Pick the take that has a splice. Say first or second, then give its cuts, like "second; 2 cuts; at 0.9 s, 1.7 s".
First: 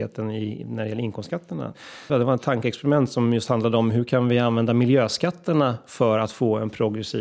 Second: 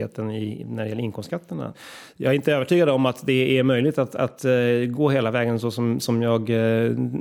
first; 1 cut; at 2.1 s